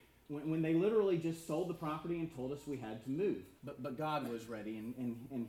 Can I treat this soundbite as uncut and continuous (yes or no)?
no